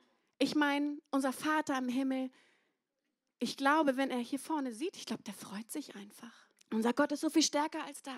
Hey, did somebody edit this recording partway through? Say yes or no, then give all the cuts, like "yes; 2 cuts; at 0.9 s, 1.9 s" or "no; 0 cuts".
yes; 2 cuts; at 4.9 s, 6.6 s